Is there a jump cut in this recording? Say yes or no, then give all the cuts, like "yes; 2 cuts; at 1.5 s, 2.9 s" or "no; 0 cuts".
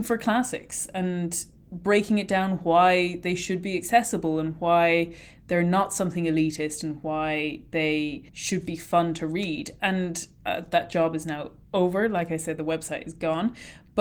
yes; 1 cut; at 8.3 s